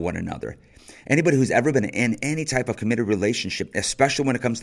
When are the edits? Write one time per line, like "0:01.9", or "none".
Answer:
none